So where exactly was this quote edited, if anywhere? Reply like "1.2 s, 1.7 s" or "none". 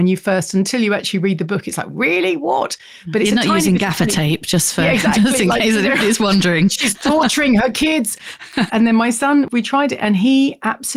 8.7 s